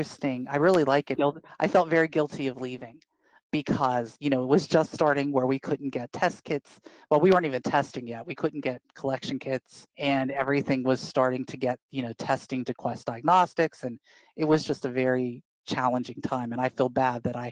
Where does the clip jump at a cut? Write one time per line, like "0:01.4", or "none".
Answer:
0:01.2
0:09.9